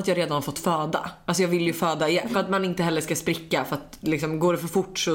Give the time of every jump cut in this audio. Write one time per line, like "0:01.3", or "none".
0:02.3